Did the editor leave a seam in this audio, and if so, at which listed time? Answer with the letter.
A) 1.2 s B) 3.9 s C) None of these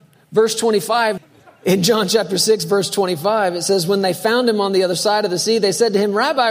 A